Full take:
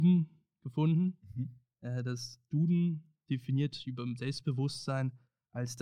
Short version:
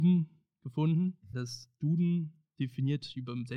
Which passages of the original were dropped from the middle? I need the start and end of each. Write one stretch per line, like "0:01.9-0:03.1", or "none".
0:01.3-0:02.0